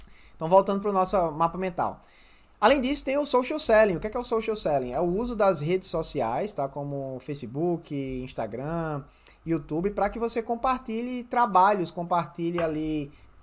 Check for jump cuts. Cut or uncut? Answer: uncut